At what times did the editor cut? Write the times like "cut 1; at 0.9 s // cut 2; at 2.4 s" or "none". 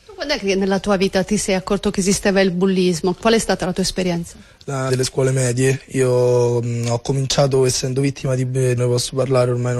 cut 1; at 4.9 s // cut 2; at 8.8 s